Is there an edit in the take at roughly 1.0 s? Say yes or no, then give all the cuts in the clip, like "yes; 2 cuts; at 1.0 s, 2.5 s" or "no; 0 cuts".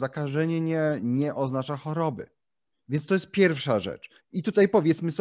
no; 2 cuts; at 2.7 s, 4.2 s